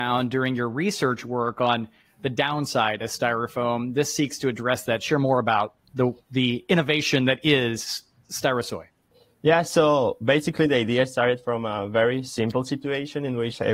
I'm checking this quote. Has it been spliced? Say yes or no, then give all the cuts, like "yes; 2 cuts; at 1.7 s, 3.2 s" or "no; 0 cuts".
no; 0 cuts